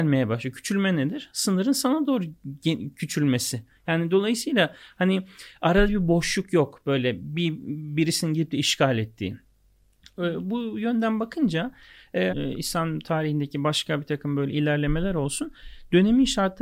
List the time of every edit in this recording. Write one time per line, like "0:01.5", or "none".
0:12.3

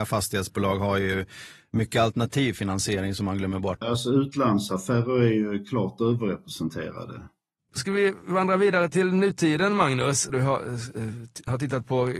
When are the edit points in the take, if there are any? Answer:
0:03.8
0:07.7
0:10.3

